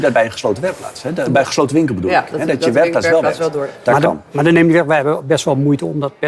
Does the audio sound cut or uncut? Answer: uncut